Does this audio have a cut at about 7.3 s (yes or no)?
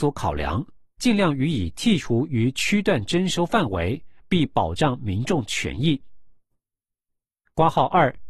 no